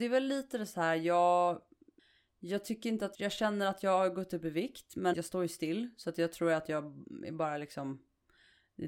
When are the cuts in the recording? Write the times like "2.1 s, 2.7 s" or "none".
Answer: 3.1 s, 5.1 s